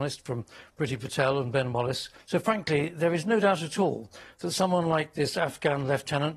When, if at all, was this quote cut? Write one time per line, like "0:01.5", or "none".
0:02.2